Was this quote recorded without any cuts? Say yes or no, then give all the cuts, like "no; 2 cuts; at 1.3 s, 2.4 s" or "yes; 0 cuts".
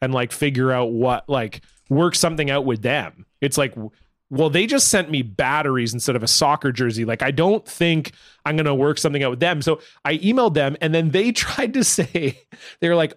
yes; 0 cuts